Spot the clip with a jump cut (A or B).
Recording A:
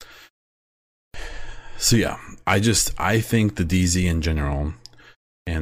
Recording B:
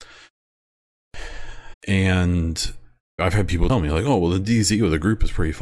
B